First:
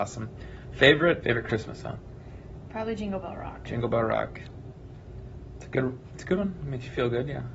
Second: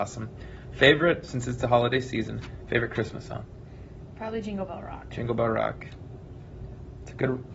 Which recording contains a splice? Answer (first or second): first